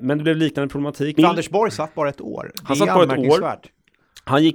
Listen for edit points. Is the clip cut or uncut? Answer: cut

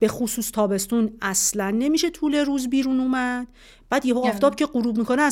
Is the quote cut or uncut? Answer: uncut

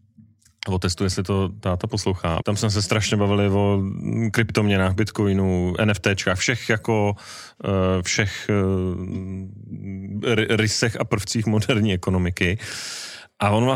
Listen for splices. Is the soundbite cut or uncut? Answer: cut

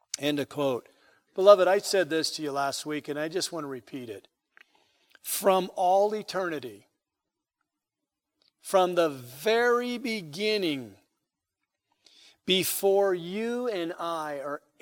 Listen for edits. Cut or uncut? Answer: uncut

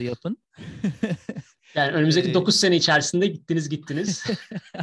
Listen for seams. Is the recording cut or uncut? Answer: uncut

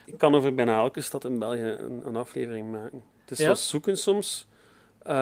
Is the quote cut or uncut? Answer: cut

